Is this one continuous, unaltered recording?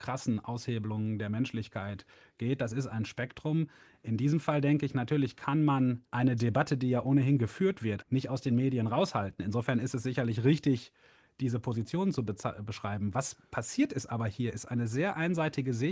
no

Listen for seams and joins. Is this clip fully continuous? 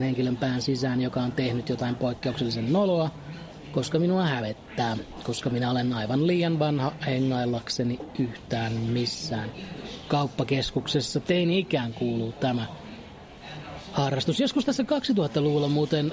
yes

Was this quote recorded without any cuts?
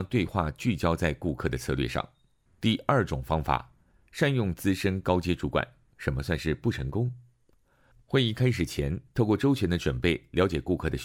no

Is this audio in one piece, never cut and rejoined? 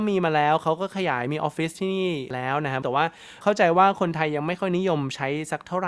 no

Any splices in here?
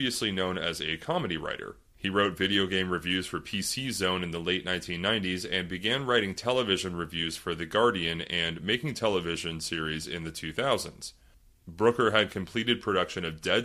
no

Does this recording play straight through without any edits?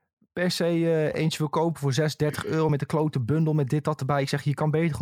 yes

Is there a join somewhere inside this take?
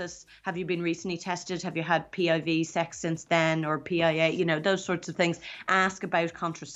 no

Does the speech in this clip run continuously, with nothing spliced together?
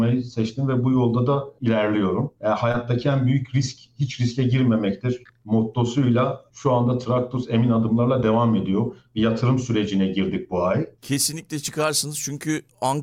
no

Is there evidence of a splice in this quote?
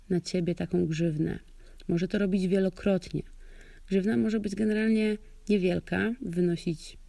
no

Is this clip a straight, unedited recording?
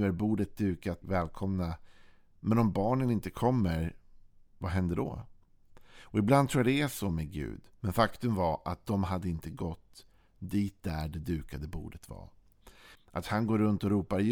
no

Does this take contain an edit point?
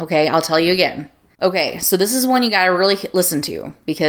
yes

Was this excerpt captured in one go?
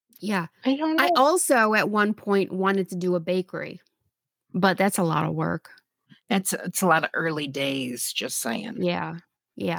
yes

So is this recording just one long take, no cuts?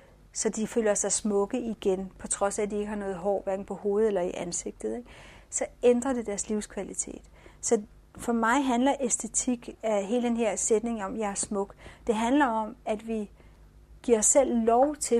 yes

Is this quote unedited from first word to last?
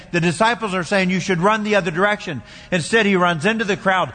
yes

